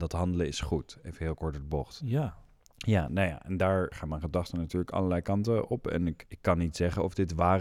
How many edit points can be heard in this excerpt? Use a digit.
1